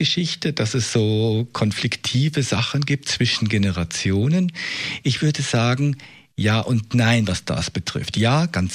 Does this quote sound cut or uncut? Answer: uncut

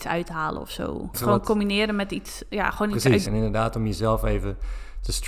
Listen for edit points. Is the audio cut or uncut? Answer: cut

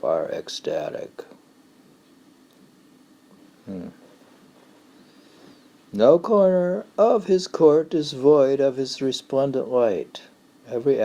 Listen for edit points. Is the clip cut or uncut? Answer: uncut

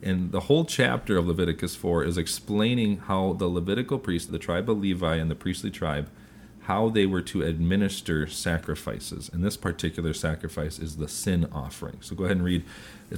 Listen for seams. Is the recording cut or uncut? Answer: cut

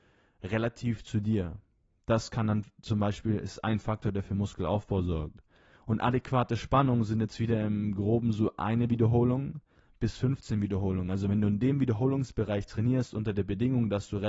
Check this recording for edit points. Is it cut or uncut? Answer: cut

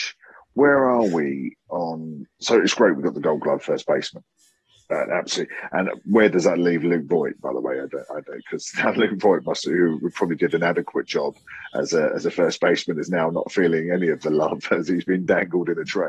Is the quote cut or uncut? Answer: uncut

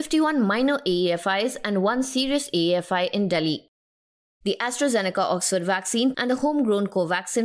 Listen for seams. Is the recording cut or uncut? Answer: cut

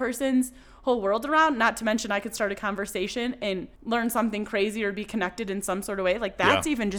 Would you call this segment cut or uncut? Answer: cut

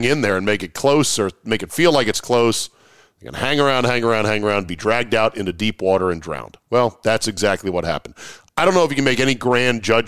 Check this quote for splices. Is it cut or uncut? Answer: uncut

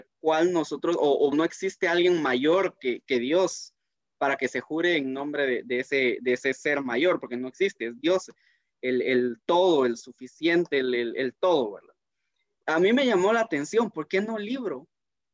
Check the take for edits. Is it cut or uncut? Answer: cut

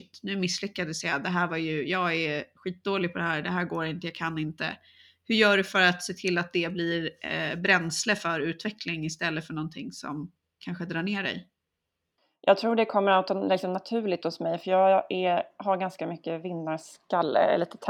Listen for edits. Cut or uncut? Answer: uncut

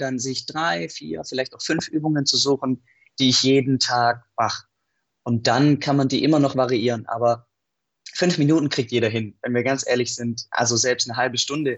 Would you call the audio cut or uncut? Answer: uncut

